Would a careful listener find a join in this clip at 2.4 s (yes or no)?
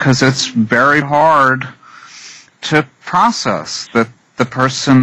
no